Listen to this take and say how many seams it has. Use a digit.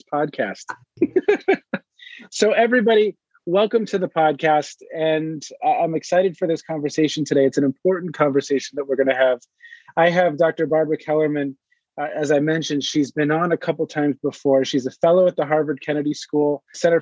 0